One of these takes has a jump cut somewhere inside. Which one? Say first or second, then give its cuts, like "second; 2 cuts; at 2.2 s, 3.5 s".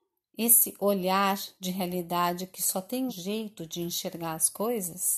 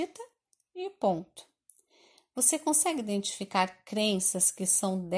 first; 1 cut; at 3.1 s